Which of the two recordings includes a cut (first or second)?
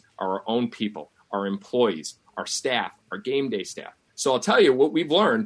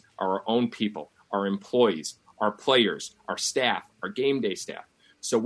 first